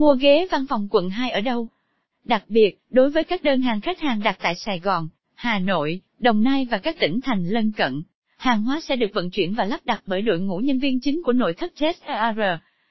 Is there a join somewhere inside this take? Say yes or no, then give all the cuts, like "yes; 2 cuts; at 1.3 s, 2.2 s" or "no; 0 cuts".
yes; 1 cut; at 6.1 s